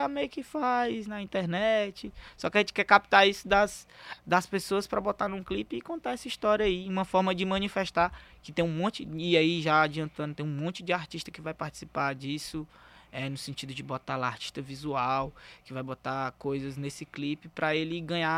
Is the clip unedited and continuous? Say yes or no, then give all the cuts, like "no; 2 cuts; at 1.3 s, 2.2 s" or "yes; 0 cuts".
yes; 0 cuts